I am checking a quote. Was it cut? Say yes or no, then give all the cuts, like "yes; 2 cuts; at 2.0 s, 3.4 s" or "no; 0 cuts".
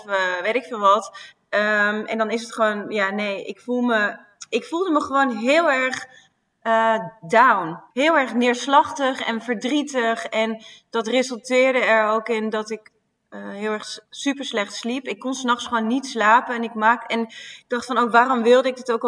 no; 0 cuts